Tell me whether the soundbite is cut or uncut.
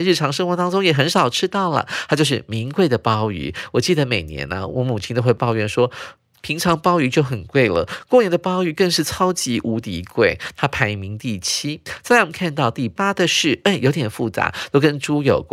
uncut